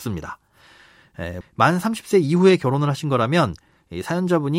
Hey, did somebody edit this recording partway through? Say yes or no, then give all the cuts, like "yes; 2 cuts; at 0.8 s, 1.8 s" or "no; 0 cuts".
yes; 1 cut; at 1.4 s